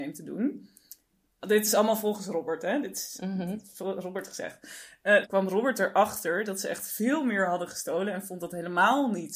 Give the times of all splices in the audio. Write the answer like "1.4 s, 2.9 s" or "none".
5.2 s